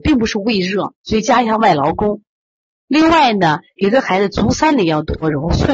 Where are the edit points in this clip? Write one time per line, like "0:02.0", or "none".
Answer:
0:01.0